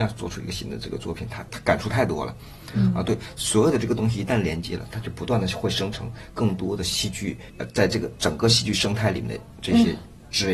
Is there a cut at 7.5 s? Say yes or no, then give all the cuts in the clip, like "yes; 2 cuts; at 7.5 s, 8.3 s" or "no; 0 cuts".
yes; 1 cut; at 7.5 s